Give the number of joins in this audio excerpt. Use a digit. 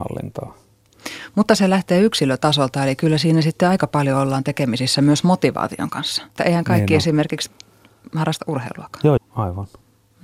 2